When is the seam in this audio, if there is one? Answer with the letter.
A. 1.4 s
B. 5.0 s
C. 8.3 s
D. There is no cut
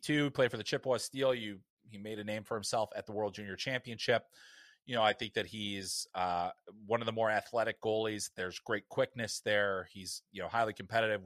D